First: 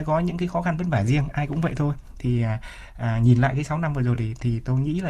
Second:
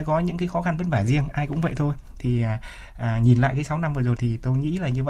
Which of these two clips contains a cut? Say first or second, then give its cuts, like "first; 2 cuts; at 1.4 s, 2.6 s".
second; 1 cut; at 4.2 s